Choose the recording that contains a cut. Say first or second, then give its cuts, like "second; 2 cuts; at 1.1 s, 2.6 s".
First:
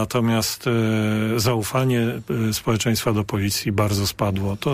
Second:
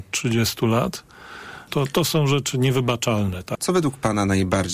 second; 2 cuts; at 1.7 s, 3.5 s